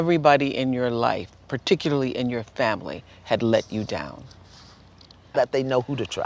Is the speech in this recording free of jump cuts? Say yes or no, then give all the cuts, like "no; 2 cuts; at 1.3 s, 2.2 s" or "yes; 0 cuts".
no; 1 cut; at 5.3 s